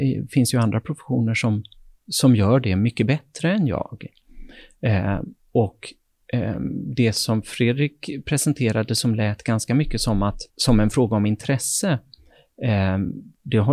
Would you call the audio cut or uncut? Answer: cut